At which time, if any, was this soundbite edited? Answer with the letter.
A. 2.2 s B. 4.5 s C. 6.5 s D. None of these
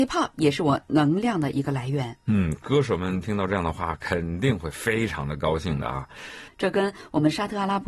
C